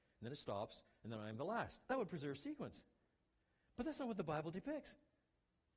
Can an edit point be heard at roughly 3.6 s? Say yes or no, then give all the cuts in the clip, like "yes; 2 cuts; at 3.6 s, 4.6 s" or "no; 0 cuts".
no; 0 cuts